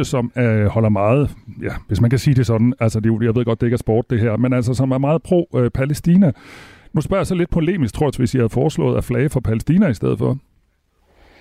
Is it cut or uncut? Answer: cut